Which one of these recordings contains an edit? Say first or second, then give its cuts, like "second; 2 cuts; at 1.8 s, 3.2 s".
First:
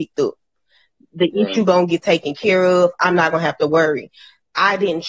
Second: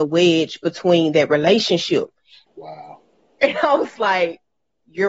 second; 1 cut; at 2.5 s